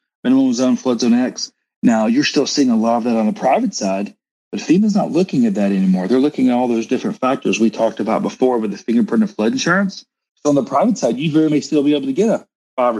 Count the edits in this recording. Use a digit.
2